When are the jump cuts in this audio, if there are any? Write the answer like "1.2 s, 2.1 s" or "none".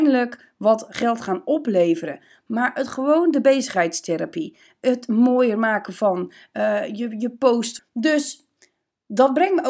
7.8 s